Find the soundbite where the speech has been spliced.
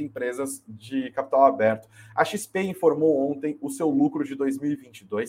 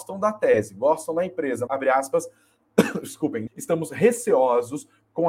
second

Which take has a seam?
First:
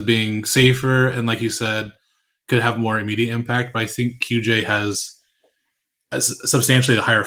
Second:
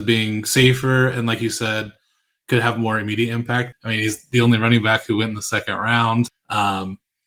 second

